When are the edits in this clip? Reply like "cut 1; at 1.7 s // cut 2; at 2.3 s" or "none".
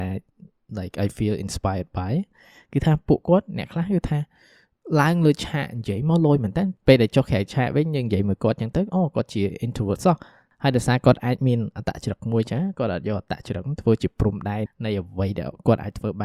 cut 1; at 14.7 s